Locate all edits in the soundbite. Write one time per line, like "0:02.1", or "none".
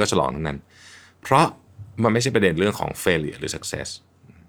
0:01.9